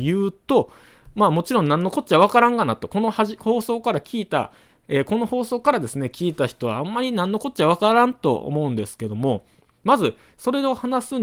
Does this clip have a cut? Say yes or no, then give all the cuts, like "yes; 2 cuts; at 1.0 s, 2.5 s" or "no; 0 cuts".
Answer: no; 0 cuts